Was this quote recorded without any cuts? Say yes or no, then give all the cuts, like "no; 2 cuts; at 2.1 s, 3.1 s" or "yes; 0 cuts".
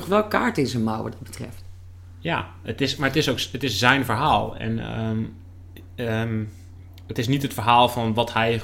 yes; 0 cuts